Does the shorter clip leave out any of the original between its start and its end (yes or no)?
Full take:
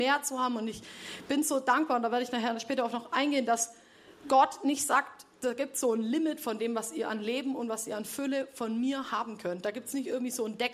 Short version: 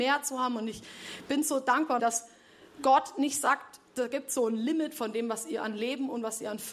yes